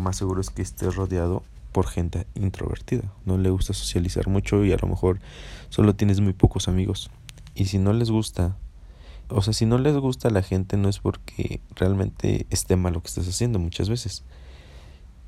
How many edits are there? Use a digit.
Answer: 3